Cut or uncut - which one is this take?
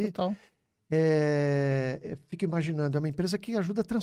uncut